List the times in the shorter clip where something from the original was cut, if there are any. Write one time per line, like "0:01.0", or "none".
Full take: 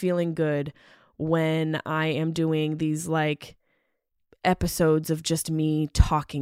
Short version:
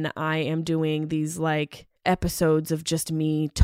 0:02.0